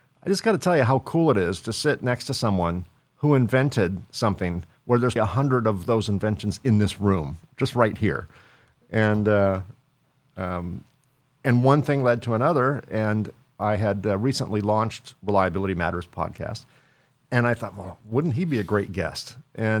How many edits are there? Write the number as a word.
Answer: one